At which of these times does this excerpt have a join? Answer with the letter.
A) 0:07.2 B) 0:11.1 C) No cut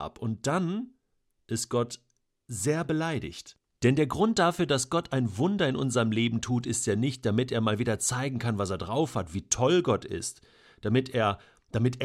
C